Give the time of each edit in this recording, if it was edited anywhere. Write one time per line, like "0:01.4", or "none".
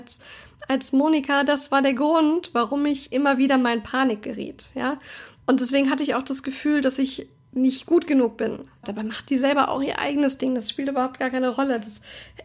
0:08.8